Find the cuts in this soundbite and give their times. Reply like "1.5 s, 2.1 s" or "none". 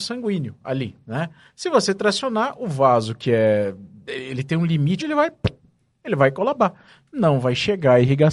5.0 s